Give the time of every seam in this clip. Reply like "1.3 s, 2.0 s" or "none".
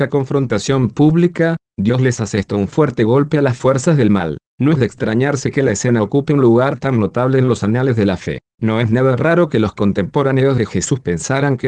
none